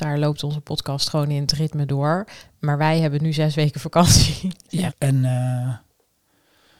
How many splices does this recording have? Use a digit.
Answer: 1